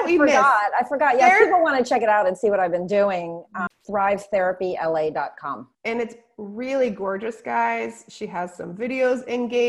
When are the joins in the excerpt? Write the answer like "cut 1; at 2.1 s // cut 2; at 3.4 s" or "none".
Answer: cut 1; at 3.7 s // cut 2; at 5.7 s